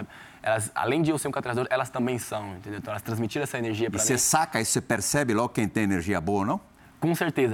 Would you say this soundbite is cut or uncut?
uncut